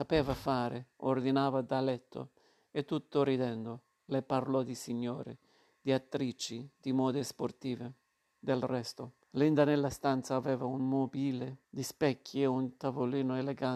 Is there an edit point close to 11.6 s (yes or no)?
yes